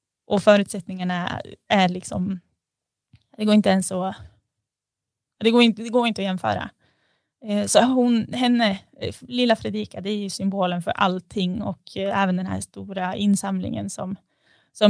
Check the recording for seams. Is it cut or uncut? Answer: uncut